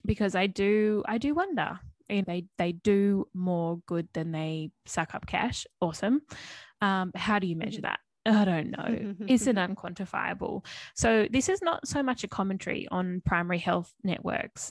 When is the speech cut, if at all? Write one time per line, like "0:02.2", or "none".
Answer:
0:02.2

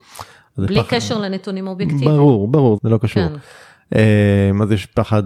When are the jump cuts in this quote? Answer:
0:02.8

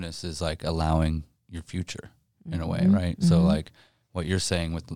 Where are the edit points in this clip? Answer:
none

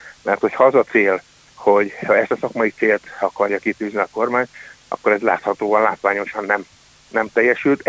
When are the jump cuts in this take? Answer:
none

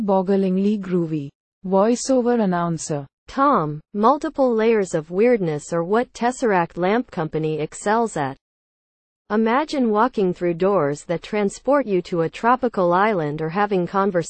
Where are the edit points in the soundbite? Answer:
0:03.2

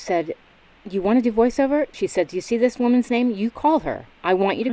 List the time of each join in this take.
0:01.9

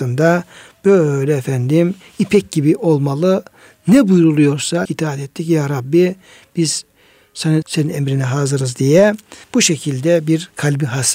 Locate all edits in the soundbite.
0:04.8
0:07.6
0:09.4

